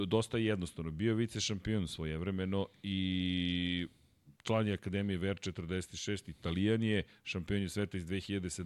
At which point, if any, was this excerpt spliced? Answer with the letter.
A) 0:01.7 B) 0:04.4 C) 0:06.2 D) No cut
B